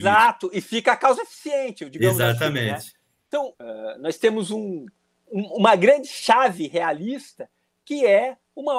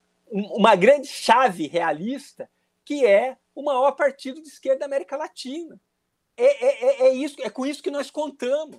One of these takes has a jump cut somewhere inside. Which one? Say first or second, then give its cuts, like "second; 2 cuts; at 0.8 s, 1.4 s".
first; 1 cut; at 3.5 s